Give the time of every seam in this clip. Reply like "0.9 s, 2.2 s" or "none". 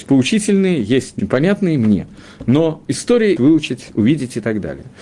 1.2 s, 3.4 s

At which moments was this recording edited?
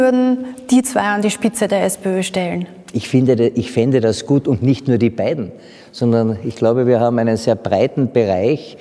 none

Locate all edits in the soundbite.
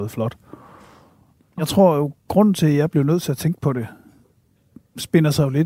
none

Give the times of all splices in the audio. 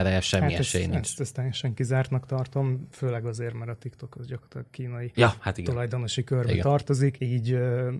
none

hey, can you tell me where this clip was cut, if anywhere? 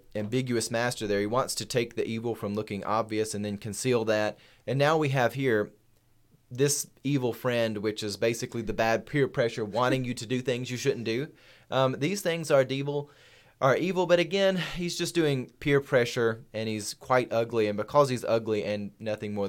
none

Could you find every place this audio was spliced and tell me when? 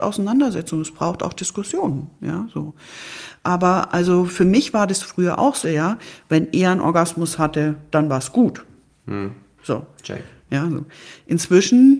5.6 s, 10.5 s

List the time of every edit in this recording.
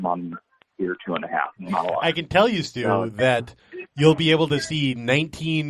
1.6 s

